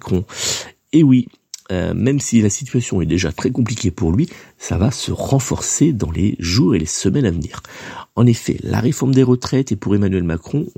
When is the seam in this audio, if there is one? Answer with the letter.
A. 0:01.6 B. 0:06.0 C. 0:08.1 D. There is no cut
D